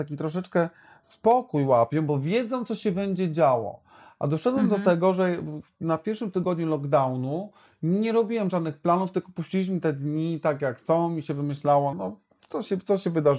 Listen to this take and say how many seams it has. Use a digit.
1